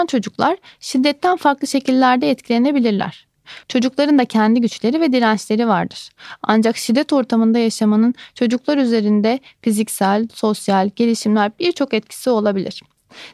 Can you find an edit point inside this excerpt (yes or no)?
yes